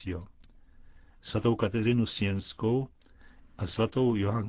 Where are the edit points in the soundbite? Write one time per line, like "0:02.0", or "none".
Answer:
0:01.1